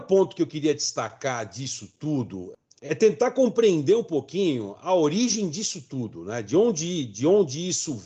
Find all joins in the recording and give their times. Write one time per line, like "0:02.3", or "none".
none

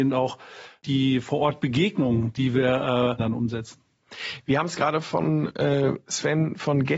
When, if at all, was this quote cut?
0:03.2

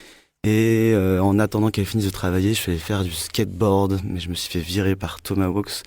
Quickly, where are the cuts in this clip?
none

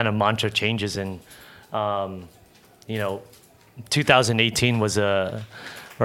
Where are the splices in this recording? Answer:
none

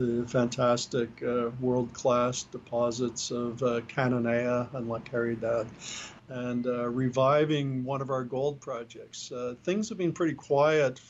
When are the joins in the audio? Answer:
0:06.2

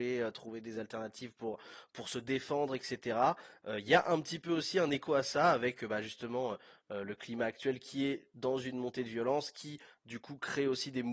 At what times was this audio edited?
none

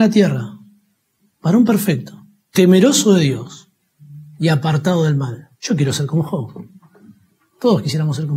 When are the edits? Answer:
0:02.5
0:05.5

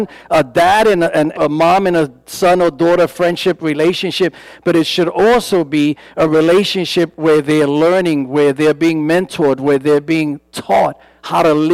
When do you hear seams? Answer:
0:01.3

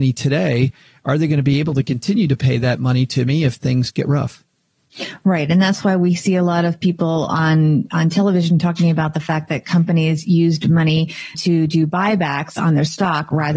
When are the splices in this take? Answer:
0:11.3

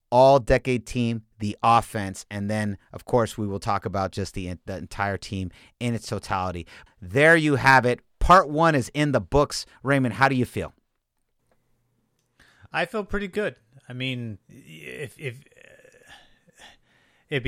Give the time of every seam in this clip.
0:06.9
0:14.4

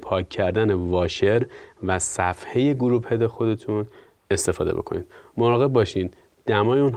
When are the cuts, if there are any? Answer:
none

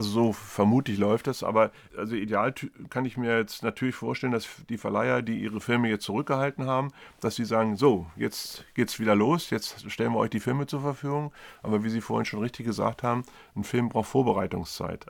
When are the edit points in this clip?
none

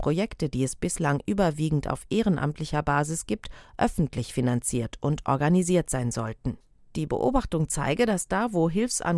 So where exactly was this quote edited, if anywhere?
none

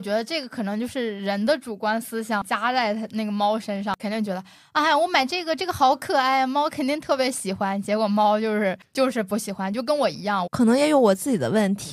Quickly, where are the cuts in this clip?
0:10.5

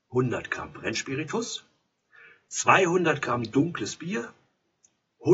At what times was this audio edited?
none

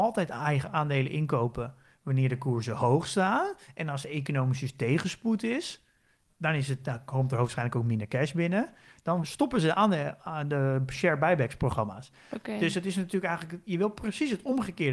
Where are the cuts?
0:06.3

